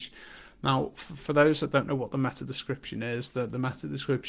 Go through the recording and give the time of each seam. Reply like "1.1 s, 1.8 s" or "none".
none